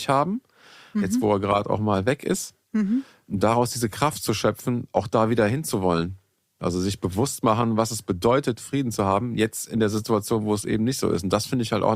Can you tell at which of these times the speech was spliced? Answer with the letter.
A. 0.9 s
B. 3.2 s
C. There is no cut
A